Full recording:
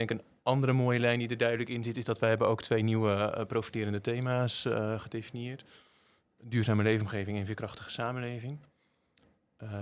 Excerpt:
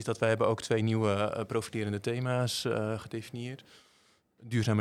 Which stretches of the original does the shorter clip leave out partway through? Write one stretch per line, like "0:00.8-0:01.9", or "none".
none

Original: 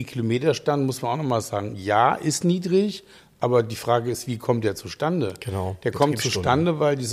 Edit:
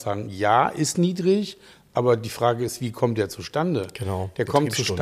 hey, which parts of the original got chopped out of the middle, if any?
none

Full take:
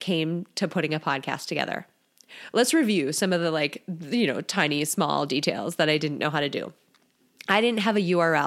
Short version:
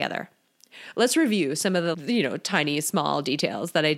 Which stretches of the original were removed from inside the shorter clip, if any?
0:03.5-0:04.0

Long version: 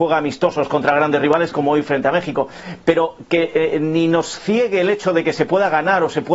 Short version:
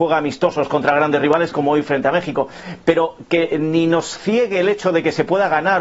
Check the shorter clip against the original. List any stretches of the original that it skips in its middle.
0:03.5-0:03.7

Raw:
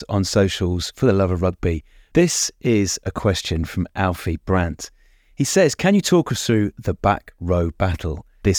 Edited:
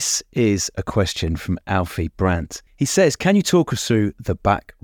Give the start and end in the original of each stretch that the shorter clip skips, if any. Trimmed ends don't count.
0:05.0-0:05.3

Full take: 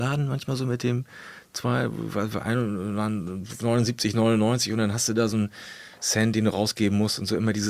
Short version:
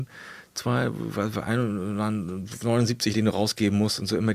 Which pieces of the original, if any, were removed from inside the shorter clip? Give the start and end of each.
0:04.1-0:06.3

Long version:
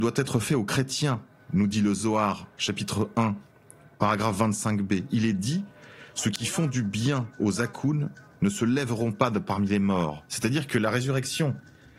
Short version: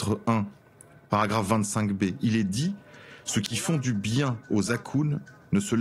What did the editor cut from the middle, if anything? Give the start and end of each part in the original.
none

